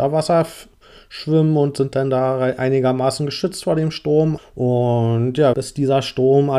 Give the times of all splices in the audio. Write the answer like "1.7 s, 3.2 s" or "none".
4.4 s, 5.5 s